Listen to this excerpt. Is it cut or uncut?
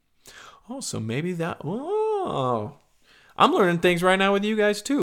uncut